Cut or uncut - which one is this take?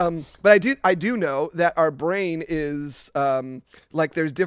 uncut